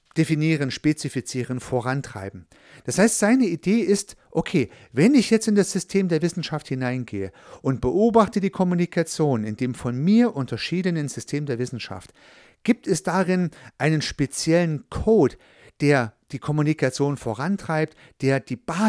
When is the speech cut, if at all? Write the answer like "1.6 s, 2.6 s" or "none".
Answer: none